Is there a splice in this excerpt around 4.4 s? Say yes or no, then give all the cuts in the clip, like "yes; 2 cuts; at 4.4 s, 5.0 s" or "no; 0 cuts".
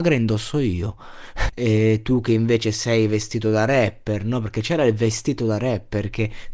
no; 1 cut; at 1.5 s